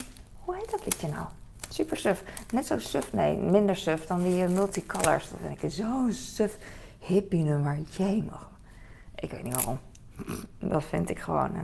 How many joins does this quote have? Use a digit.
0